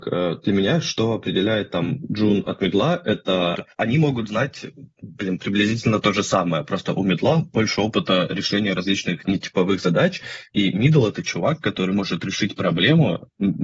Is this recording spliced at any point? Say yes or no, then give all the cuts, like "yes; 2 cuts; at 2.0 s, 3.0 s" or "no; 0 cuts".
yes; 1 cut; at 3.7 s